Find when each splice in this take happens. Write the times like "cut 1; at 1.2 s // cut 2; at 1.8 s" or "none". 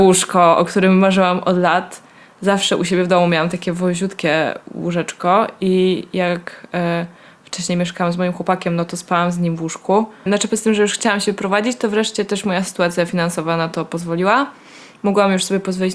cut 1; at 10.3 s

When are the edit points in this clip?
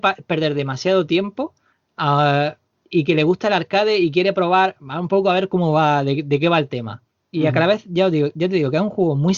none

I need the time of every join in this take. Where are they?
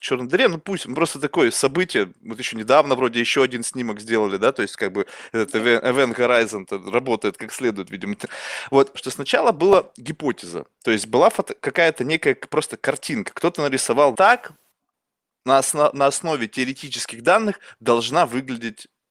cut 1; at 8.9 s // cut 2; at 14.1 s

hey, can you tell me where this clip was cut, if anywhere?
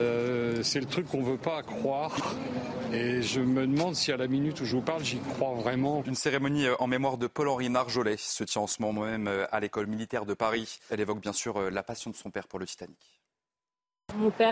cut 1; at 6.0 s // cut 2; at 10.9 s

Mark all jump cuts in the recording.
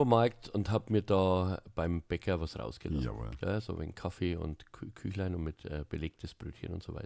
none

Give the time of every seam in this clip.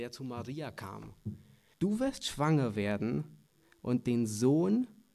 cut 1; at 1.7 s

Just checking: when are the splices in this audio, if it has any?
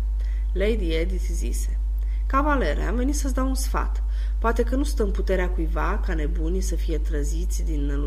none

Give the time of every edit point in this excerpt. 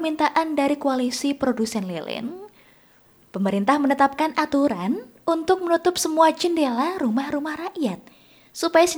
none

